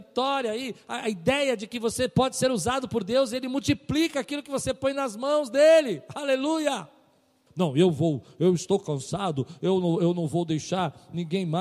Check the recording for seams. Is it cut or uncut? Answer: cut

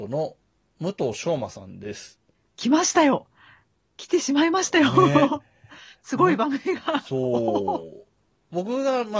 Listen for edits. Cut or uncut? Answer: uncut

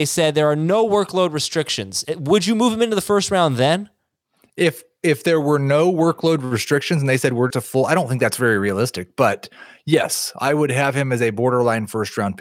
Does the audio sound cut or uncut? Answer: cut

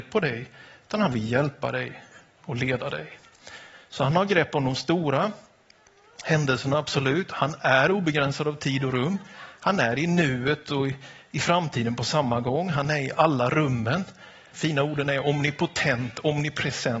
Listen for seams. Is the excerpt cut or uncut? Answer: cut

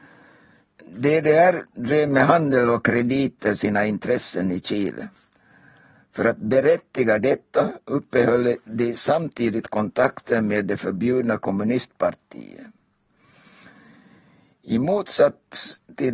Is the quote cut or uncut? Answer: uncut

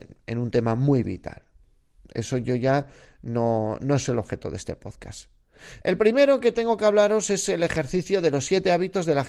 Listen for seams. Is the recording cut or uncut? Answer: cut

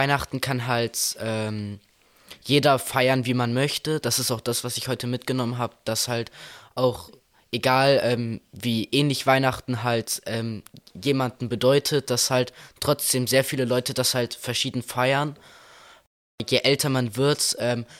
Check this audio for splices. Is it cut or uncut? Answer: uncut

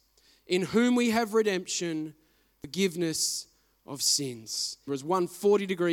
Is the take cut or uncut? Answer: cut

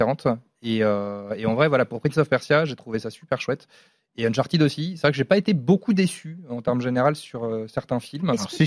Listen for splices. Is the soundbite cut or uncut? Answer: uncut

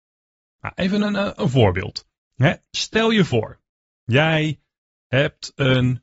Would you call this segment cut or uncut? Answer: uncut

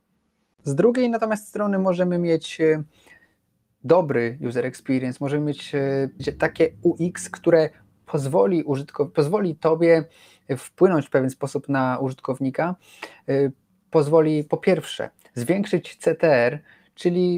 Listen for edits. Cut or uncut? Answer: cut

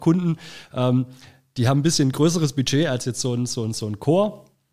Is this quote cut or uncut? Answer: uncut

